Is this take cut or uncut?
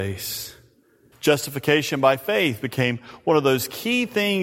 cut